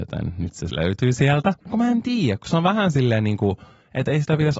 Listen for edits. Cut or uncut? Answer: cut